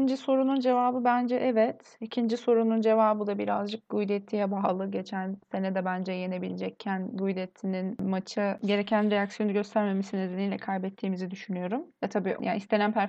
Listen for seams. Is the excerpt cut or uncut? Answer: uncut